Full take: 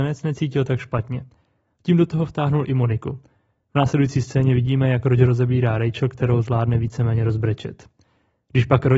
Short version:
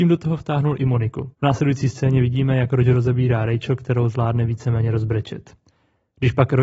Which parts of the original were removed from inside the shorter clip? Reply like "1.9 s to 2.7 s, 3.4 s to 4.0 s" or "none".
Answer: 3.2 s to 3.7 s